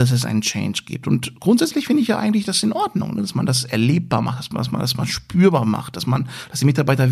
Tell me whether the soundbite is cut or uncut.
uncut